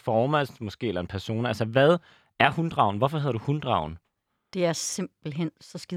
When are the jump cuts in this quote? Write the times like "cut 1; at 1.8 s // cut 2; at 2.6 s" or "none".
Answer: none

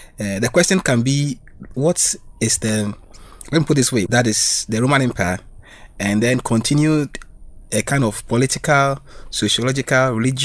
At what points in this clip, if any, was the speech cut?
cut 1; at 1.7 s // cut 2; at 4.1 s

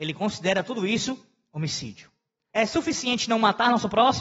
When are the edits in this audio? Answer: cut 1; at 2.5 s

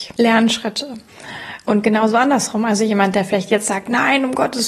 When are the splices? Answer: none

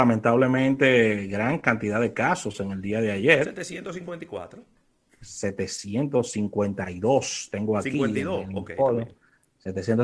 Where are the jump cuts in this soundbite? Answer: none

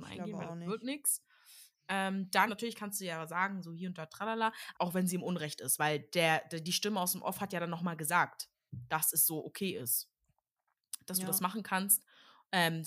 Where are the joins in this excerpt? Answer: cut 1; at 2.5 s // cut 2; at 4.7 s

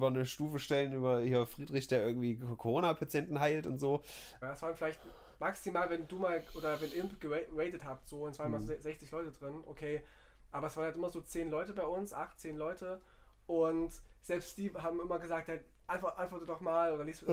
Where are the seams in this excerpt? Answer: cut 1; at 4.4 s

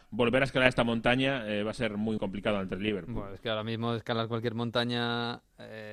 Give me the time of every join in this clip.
cut 1; at 2.2 s

